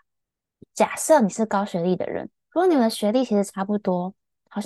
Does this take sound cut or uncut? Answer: cut